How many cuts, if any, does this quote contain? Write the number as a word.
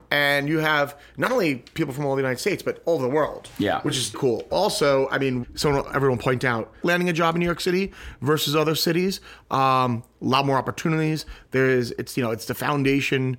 three